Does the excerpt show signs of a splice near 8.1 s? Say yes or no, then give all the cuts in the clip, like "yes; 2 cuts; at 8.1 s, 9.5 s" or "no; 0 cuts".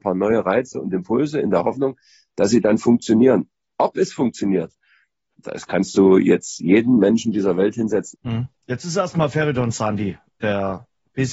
yes; 1 cut; at 8.1 s